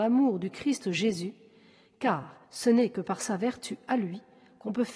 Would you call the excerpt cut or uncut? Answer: cut